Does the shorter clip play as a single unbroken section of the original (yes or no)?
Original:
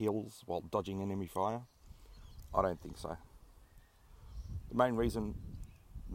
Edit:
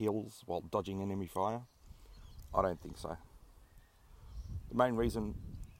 yes